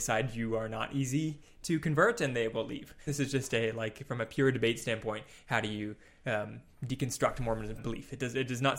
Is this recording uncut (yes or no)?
no